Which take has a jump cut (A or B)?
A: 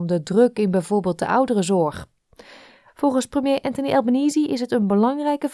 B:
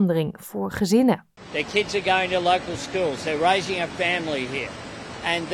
A